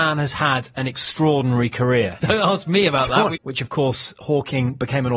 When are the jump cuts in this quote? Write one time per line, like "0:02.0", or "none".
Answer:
0:02.2
0:03.4